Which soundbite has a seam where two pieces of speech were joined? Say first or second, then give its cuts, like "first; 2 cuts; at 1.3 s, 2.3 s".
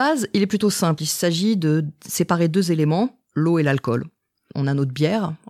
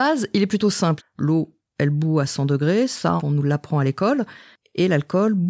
second; 2 cuts; at 1.0 s, 3.2 s